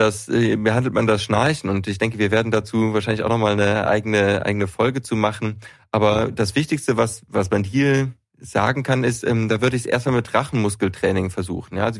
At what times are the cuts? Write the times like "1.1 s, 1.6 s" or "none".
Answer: none